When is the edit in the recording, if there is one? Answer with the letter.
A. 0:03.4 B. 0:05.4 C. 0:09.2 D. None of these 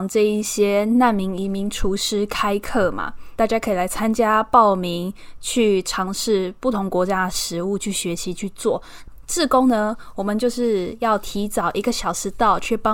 A